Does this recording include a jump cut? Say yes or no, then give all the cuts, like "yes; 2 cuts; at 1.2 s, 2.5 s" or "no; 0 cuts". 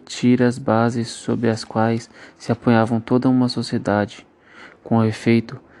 no; 0 cuts